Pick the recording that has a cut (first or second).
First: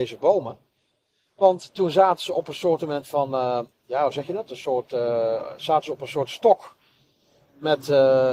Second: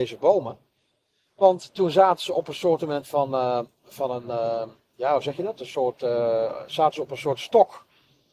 first